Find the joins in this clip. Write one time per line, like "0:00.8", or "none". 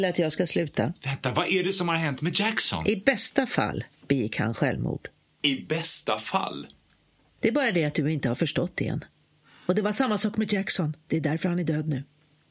0:07.4